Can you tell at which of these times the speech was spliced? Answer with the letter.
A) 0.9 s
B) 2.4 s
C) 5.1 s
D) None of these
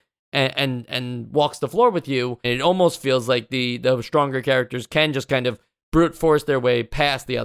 B